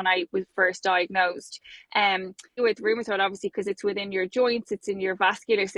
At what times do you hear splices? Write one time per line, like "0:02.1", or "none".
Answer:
0:02.6